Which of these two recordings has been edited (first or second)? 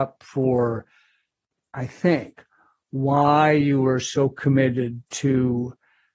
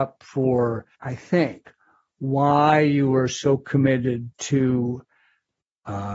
second